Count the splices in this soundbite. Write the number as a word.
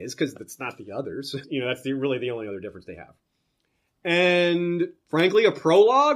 one